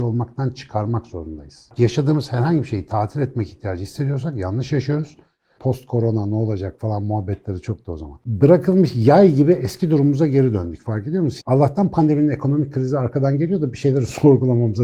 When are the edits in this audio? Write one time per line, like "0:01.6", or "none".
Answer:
0:05.6
0:11.4